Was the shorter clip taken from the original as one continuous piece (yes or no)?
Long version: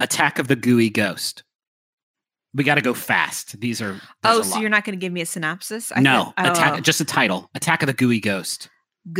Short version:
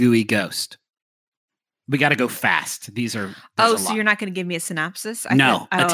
yes